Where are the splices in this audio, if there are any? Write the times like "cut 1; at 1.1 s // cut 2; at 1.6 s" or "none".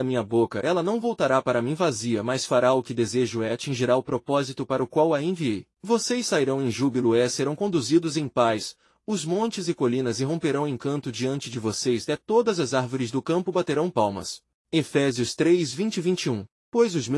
cut 1; at 5.7 s // cut 2; at 14.6 s